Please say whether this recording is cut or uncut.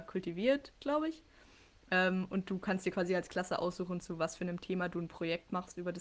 uncut